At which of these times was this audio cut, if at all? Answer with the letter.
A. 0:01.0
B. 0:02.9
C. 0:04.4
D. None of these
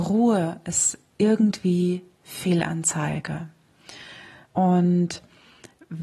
C